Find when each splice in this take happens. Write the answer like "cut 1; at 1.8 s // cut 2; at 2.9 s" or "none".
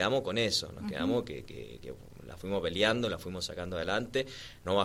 none